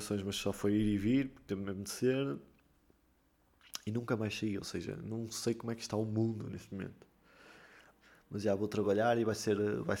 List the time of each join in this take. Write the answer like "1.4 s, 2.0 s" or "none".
none